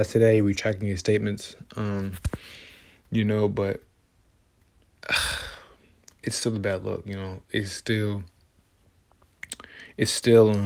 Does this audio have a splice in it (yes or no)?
no